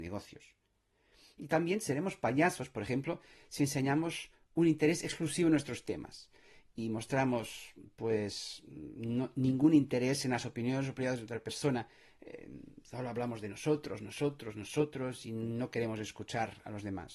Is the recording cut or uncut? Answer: uncut